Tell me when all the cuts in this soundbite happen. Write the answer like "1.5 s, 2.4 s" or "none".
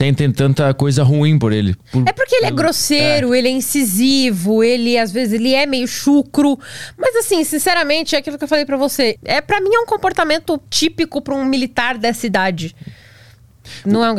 9.2 s, 10.7 s